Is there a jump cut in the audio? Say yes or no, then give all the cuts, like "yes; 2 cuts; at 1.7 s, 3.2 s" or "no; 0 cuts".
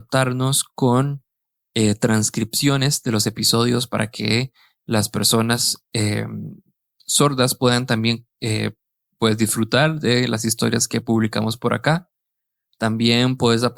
no; 0 cuts